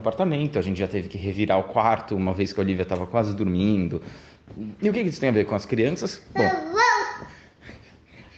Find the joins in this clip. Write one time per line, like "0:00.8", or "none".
0:04.8